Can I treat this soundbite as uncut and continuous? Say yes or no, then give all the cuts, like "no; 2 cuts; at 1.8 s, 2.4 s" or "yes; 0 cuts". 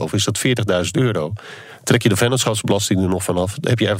yes; 0 cuts